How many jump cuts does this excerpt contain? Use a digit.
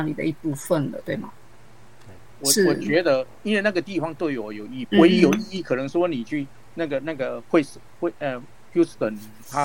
2